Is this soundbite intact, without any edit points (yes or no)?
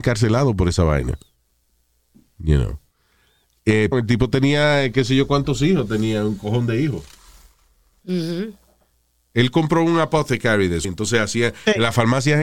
no